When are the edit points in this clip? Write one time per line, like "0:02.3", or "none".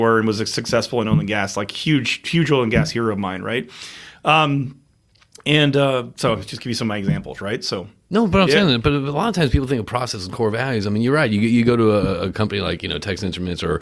none

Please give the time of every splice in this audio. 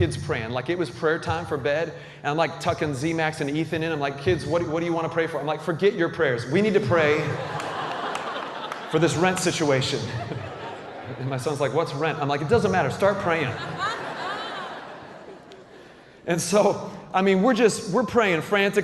none

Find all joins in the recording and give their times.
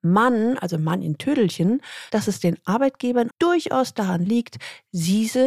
0:02.1
0:03.3

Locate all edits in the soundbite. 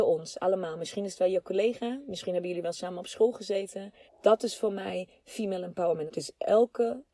0:04.1
0:06.1

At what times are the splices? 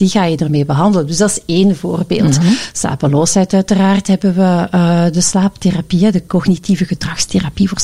none

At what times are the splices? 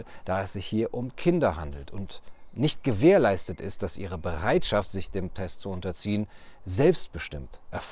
none

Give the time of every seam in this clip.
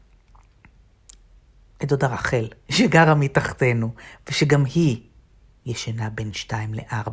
0:02.7

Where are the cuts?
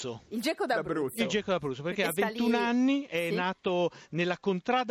none

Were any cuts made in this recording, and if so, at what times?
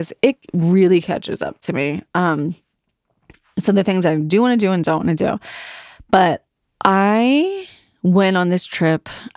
none

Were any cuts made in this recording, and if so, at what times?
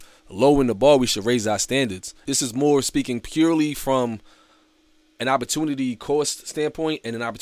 0:02.3

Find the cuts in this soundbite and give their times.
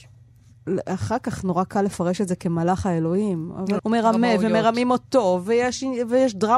0:03.8

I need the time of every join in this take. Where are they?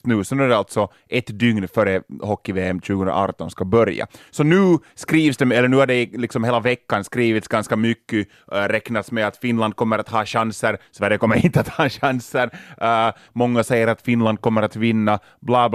0:13.3

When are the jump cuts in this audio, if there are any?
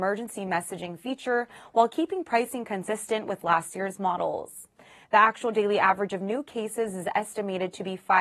0:05.0

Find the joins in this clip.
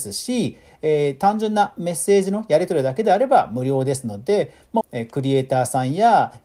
0:04.8

